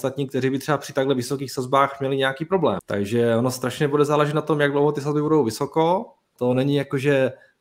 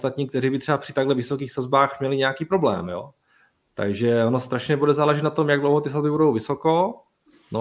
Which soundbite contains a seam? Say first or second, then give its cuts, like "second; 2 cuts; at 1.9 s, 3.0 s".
first; 2 cuts; at 2.8 s, 6.4 s